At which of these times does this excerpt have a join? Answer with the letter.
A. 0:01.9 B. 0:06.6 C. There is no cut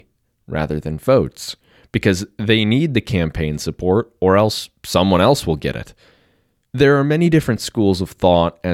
B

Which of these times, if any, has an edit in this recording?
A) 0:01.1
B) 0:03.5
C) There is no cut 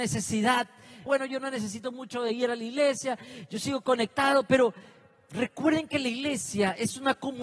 A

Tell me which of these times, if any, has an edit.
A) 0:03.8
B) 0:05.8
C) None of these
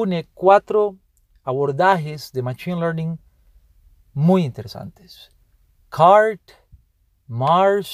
C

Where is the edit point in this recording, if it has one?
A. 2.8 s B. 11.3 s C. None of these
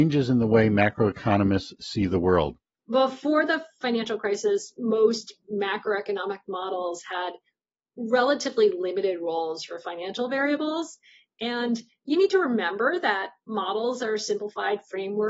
A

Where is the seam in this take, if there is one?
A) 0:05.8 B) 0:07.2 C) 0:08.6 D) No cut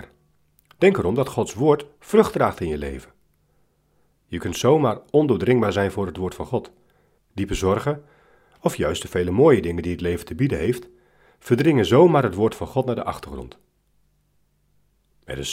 B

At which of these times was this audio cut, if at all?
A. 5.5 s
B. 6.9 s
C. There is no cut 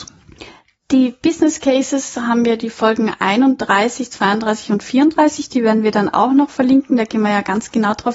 C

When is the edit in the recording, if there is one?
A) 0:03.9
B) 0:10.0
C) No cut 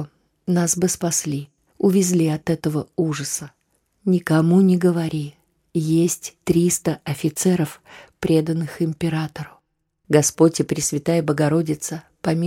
B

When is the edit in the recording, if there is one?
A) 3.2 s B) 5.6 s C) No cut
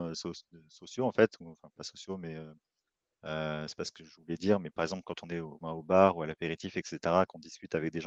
B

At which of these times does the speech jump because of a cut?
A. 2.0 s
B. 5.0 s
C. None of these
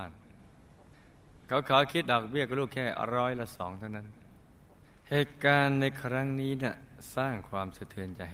A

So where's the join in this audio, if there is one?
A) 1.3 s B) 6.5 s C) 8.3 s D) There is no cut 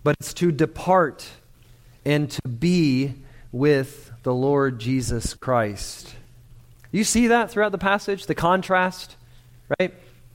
D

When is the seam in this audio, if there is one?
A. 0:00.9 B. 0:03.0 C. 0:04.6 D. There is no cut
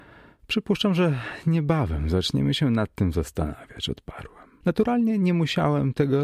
C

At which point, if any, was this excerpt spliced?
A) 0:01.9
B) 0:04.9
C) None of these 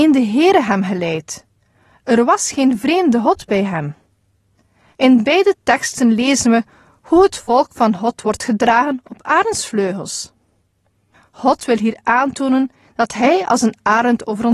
B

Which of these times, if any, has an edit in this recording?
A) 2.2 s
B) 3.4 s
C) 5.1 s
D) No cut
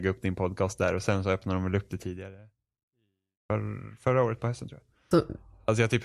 C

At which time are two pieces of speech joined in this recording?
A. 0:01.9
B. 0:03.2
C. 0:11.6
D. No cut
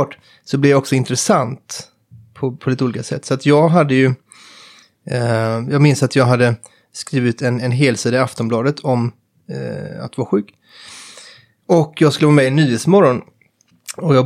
D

